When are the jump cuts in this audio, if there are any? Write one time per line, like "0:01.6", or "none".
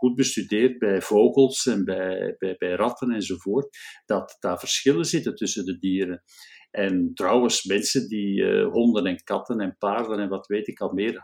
none